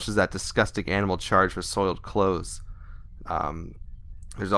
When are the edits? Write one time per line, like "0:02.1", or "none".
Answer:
0:03.3